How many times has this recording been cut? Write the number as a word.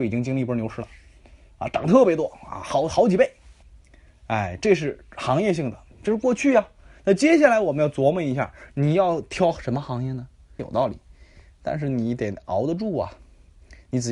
one